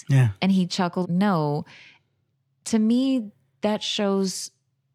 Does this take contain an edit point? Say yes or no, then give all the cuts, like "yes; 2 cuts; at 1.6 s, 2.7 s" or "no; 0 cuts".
yes; 1 cut; at 1.0 s